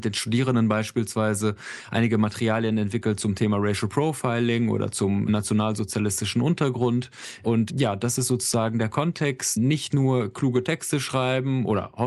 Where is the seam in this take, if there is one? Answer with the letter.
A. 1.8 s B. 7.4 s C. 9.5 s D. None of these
D